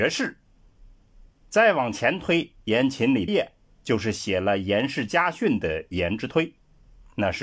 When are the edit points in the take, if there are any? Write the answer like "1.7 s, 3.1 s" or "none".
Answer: 3.3 s